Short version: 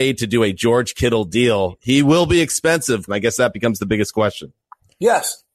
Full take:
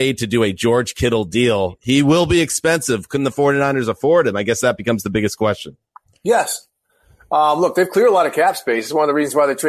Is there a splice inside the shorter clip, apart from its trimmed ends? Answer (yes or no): yes